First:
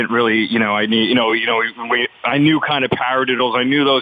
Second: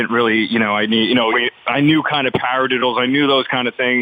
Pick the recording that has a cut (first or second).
second